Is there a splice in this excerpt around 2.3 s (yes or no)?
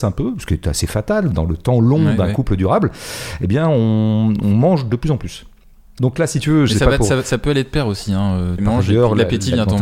no